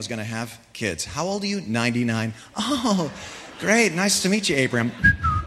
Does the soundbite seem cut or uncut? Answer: uncut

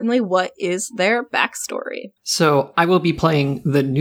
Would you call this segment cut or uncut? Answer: cut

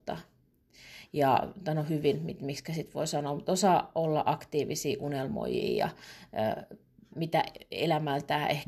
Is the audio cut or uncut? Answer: cut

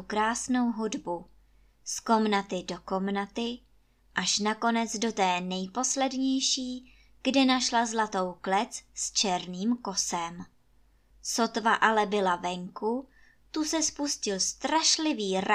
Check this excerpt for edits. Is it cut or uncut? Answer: cut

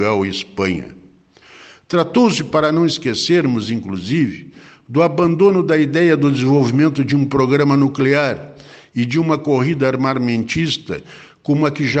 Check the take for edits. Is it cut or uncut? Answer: uncut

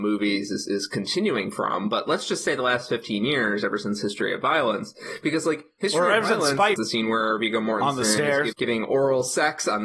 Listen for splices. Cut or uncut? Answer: cut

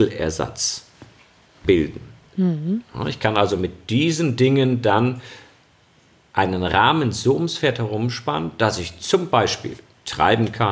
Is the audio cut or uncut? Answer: uncut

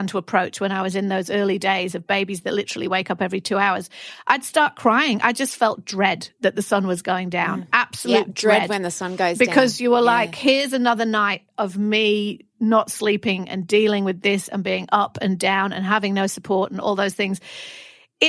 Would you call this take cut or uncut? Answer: uncut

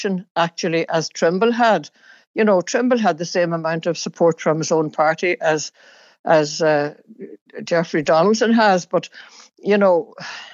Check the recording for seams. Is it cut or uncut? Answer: uncut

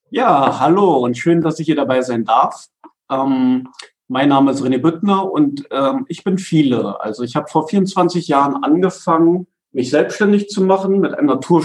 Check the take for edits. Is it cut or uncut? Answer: uncut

